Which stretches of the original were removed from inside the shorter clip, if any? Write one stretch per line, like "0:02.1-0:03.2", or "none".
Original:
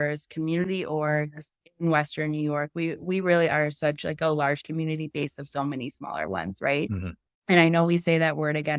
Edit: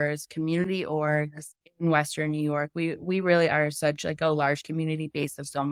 none